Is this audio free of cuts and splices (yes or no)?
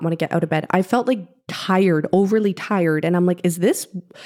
yes